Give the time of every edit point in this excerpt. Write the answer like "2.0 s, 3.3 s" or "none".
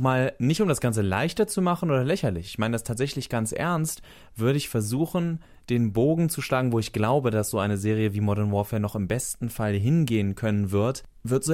none

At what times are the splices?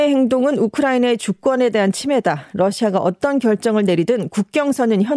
none

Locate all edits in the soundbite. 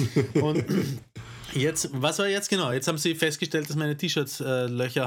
none

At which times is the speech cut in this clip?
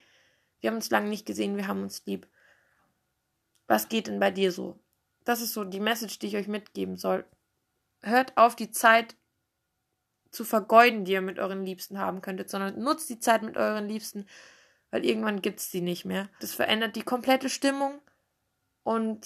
5.2 s, 16.4 s

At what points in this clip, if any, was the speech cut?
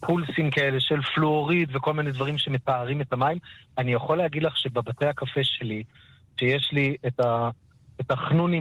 none

